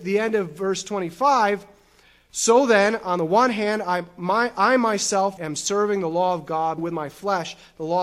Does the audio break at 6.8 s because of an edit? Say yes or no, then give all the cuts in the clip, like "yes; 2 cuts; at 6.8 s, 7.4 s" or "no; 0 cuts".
yes; 2 cuts; at 5.4 s, 6.8 s